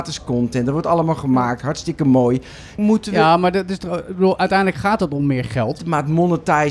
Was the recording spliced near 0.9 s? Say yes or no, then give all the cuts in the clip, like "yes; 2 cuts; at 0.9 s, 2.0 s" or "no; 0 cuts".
no; 2 cuts; at 2.8 s, 5.8 s